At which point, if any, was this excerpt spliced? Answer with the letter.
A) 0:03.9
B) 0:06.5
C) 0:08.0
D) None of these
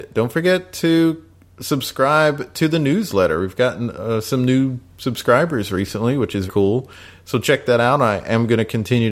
B